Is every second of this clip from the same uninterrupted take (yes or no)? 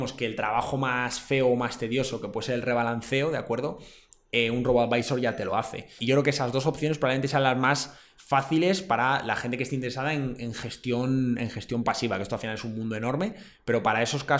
no